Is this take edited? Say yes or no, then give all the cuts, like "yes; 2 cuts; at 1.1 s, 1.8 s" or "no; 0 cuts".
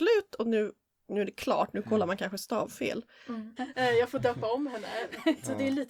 yes; 1 cut; at 3.6 s